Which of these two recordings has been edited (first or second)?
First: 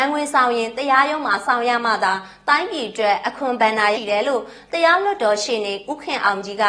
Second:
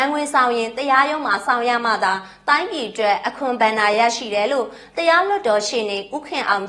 first